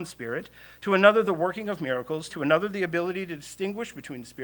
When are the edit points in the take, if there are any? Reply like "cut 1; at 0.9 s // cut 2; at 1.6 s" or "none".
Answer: cut 1; at 2.3 s

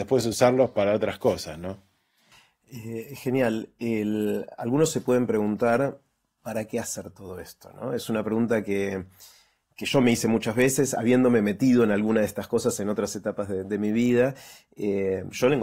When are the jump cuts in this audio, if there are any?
none

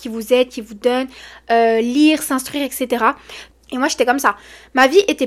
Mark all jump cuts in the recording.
cut 1; at 3.5 s

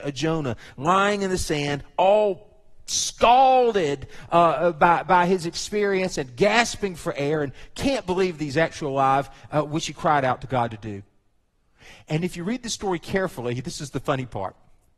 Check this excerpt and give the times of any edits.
none

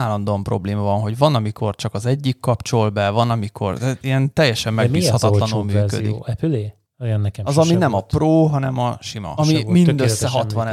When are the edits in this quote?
cut 1; at 6.8 s // cut 2; at 9.4 s

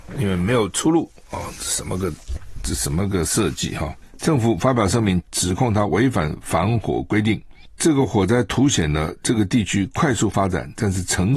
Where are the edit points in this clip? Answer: cut 1; at 4.2 s // cut 2; at 5.2 s

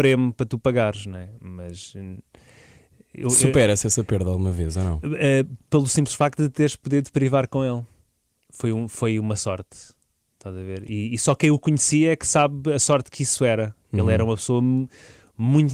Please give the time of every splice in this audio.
none

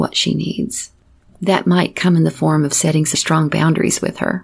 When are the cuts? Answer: cut 1; at 1.3 s // cut 2; at 3.1 s

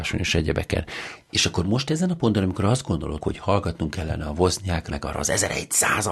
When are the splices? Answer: cut 1; at 3.2 s // cut 2; at 4.9 s

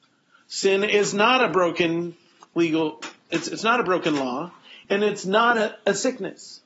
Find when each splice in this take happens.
cut 1; at 4.8 s

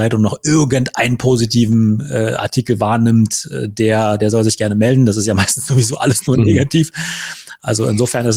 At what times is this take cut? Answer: none

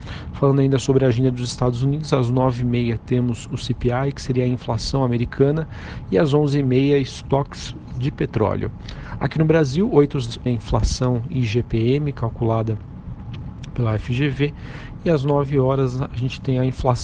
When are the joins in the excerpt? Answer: cut 1; at 10.5 s

